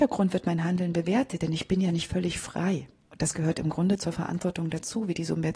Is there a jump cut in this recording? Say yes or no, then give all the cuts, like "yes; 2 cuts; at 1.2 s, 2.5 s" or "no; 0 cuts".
no; 0 cuts